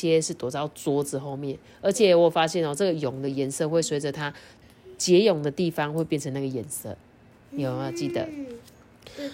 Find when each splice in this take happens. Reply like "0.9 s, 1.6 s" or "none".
7.3 s